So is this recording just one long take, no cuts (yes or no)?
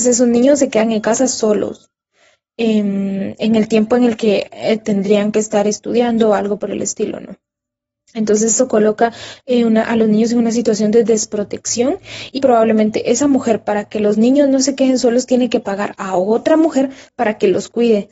no